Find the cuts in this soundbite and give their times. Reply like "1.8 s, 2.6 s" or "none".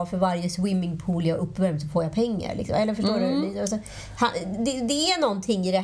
none

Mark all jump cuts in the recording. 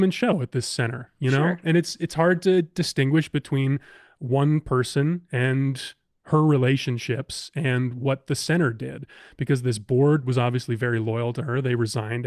none

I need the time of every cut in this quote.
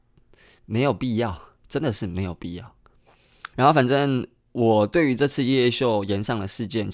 3.5 s

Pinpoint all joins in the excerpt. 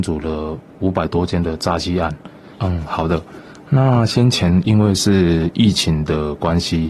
2.5 s

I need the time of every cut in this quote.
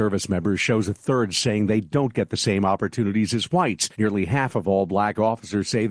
3.9 s

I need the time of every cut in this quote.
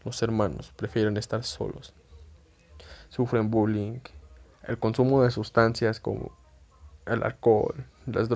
3.1 s, 4.5 s

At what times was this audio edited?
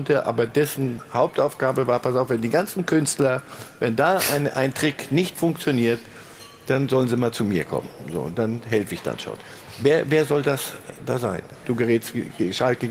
11.6 s

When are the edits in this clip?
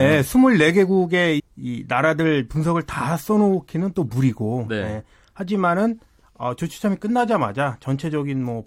1.4 s

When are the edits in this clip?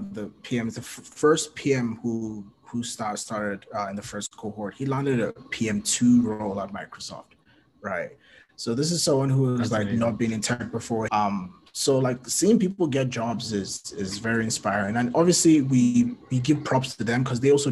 11.1 s

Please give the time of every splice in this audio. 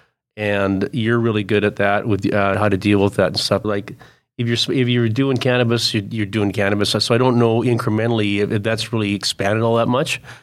2.5 s, 3.6 s

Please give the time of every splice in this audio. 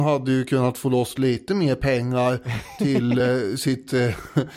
none

